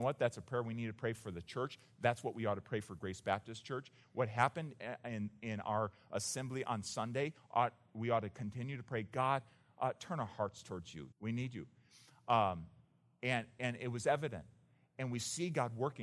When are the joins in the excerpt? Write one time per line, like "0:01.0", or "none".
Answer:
0:11.1